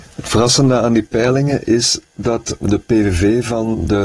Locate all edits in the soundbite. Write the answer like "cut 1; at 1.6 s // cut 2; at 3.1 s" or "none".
none